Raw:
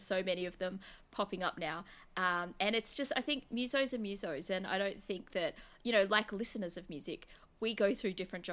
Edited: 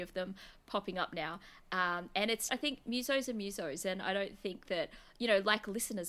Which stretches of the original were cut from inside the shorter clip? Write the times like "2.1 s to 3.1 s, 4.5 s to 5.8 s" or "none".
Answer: 2.9 s to 3.1 s